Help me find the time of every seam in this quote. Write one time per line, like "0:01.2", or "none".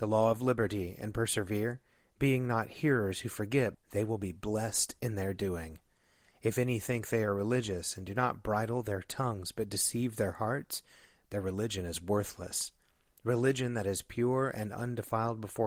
0:03.7